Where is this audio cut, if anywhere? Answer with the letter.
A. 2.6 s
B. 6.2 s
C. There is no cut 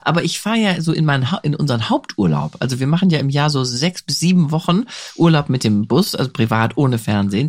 C